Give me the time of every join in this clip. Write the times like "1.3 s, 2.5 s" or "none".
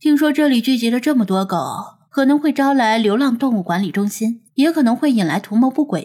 2.0 s, 4.5 s

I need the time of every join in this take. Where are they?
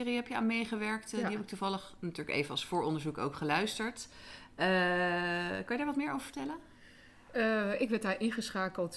none

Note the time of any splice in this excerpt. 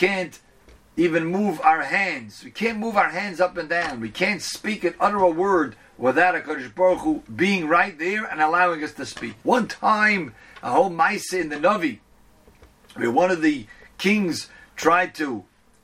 9.4 s

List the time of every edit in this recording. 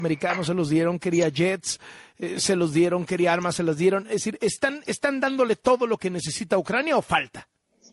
none

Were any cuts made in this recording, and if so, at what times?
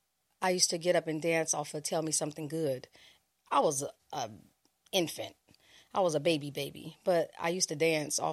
none

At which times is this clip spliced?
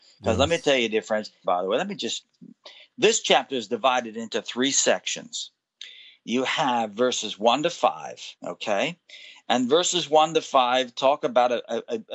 1.4 s, 8.3 s

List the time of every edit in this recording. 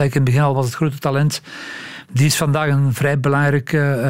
none

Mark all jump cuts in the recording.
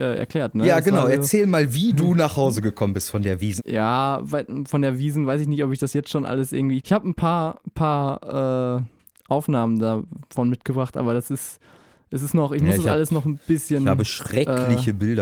3.6 s, 6.8 s

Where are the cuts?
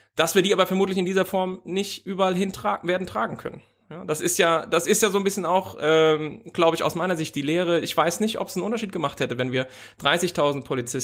none

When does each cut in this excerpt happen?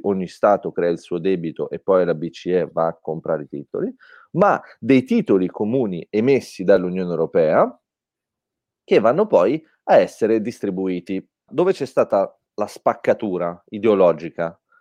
11.5 s

